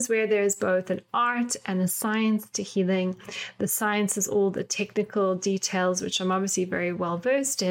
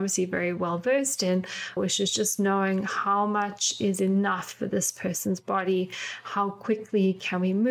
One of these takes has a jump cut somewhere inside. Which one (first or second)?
second